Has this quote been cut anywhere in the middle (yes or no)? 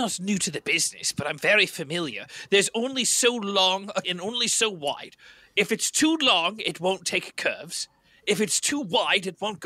yes